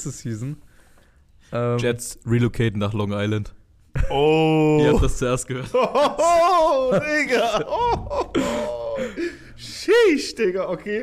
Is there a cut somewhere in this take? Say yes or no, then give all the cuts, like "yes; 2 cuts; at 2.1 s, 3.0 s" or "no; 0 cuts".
no; 0 cuts